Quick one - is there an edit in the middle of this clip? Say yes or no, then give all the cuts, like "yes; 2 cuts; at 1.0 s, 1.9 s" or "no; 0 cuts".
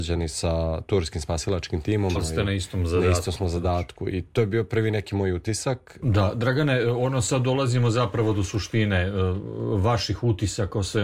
yes; 2 cuts; at 2.1 s, 6.0 s